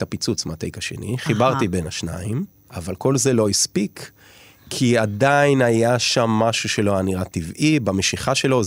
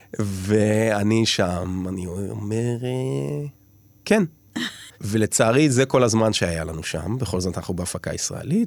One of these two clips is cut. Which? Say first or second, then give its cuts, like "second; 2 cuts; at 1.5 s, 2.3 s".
second; 1 cut; at 4.9 s